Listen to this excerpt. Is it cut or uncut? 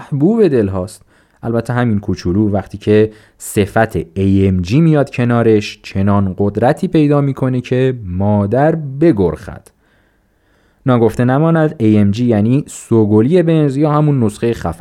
uncut